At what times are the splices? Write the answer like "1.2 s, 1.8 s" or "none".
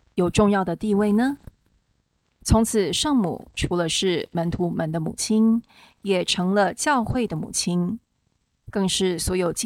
2.2 s